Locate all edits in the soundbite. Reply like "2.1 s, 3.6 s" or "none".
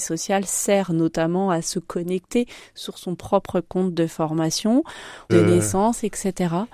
5.3 s